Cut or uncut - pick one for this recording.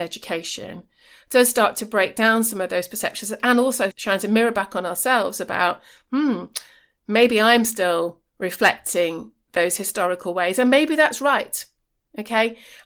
cut